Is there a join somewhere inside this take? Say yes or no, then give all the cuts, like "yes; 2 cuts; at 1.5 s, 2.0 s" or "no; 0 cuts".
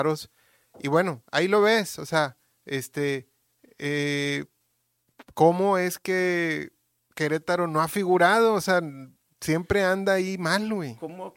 no; 0 cuts